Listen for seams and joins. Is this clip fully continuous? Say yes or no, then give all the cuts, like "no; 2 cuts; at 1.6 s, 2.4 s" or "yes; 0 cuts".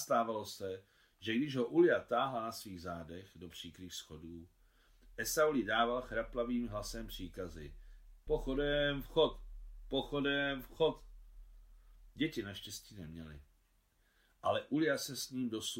no; 1 cut; at 8.3 s